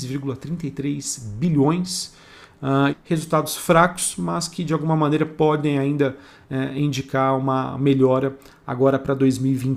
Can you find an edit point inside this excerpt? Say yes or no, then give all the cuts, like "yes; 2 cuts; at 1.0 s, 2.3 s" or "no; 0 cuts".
yes; 1 cut; at 2.9 s